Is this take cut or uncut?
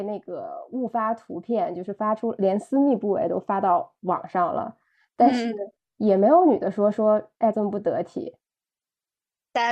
cut